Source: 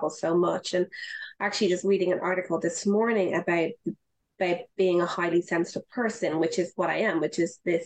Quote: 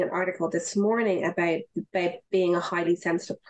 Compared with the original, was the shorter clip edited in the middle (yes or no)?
yes